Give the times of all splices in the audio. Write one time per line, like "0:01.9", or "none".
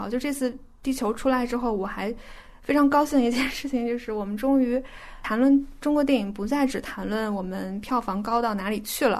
none